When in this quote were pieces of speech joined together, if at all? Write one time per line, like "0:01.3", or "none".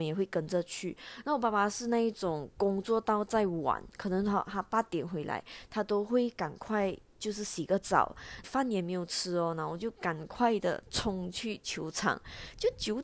0:08.4

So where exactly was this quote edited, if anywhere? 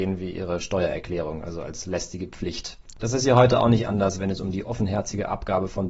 0:02.9

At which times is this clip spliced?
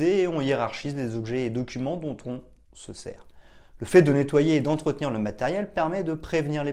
none

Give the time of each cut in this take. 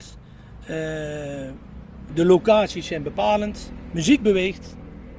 0:02.1

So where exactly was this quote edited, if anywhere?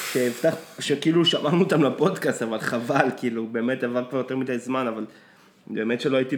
none

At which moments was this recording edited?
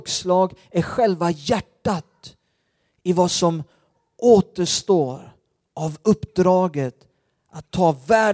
none

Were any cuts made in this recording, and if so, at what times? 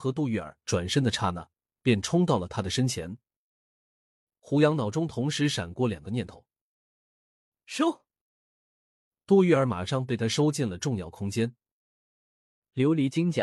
none

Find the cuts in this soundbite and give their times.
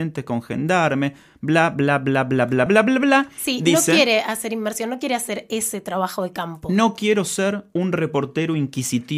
0:02.7

